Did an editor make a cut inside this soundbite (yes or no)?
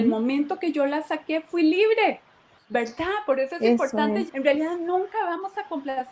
yes